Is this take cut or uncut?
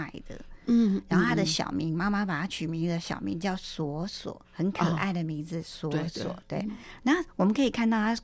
cut